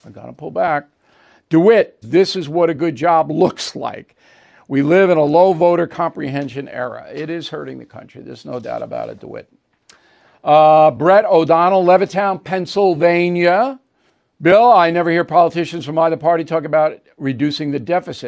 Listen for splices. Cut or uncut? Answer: cut